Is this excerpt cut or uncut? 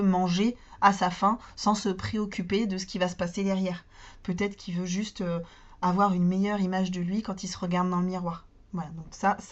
uncut